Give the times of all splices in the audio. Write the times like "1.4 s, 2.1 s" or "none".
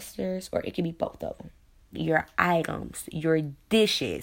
1.9 s